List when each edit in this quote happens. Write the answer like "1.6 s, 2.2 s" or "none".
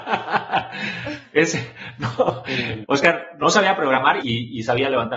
2.8 s, 4.2 s